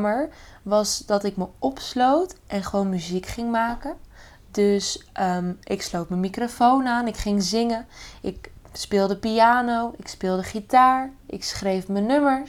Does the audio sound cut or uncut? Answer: uncut